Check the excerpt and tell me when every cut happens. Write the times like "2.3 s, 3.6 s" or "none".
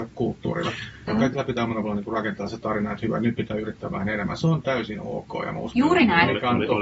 1.1 s, 5.8 s